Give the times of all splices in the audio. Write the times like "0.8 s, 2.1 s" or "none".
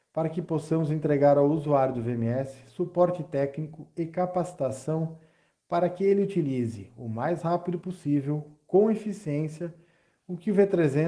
none

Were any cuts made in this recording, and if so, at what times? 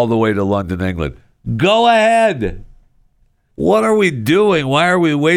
3.5 s

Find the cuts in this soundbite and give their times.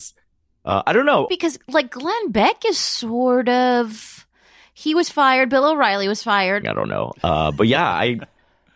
1.3 s, 6.6 s

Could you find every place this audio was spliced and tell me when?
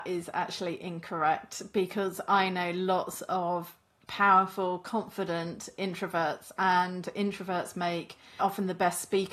8.4 s

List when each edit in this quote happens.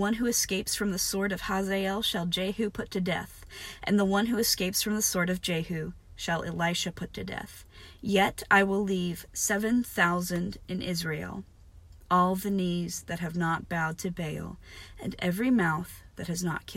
none

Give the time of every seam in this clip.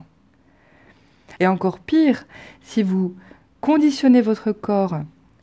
1.4 s

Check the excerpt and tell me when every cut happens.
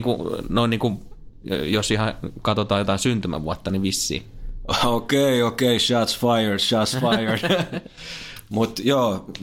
none

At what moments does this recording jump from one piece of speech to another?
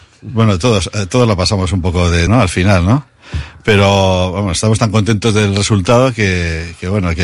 2.3 s

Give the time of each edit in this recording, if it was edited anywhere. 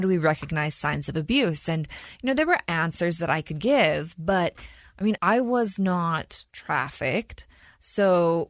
5.2 s, 6.5 s

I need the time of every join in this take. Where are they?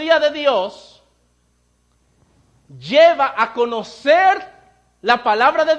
none

